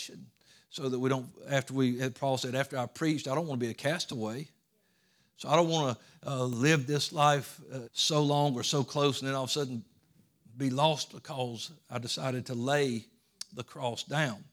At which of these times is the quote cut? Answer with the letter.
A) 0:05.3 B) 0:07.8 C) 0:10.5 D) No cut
B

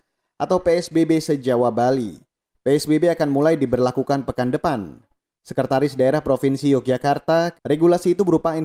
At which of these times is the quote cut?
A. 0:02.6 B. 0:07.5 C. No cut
B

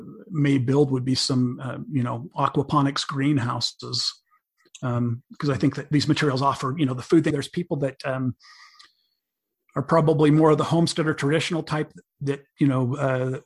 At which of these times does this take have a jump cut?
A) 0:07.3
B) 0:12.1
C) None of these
A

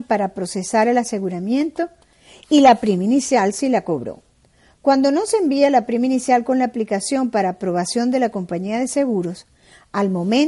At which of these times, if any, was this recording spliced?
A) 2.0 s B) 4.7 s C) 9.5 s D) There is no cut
D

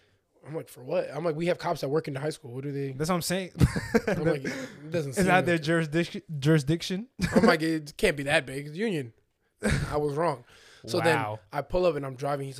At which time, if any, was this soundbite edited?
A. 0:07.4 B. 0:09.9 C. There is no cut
C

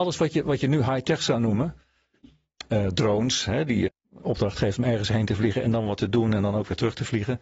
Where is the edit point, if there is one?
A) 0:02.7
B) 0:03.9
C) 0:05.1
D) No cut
B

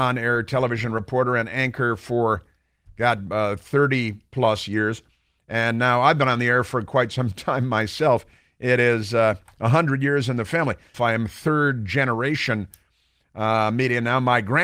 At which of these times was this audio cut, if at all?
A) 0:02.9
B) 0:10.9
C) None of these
B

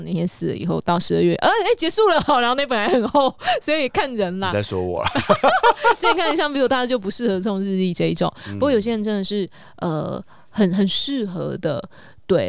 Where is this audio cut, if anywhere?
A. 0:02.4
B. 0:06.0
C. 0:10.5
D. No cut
D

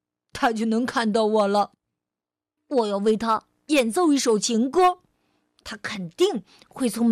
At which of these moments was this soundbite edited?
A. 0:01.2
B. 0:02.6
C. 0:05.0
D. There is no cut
B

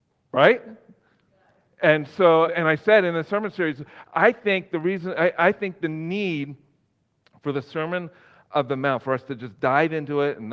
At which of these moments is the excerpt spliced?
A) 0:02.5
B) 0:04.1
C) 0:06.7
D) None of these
A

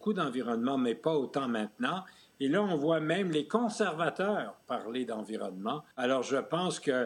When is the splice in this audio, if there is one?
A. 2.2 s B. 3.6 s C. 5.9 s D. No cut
C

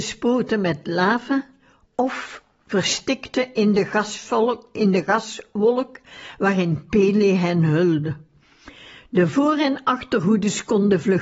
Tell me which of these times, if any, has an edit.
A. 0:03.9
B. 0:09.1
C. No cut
C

